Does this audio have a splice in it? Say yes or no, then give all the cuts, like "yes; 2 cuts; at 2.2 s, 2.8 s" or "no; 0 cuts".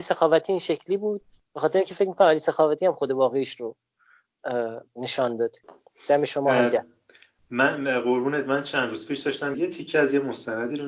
yes; 1 cut; at 9.5 s